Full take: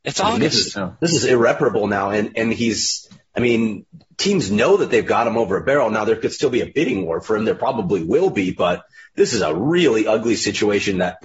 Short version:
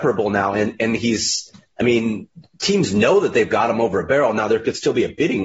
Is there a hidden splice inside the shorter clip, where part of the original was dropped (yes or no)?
no